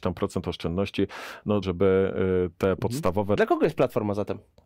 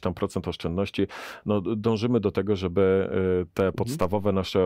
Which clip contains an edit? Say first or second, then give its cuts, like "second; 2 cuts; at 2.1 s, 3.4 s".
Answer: first; 2 cuts; at 1.6 s, 3.4 s